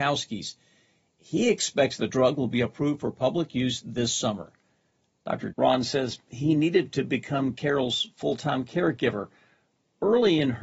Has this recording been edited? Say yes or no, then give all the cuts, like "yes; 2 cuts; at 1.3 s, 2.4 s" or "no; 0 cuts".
yes; 1 cut; at 5.5 s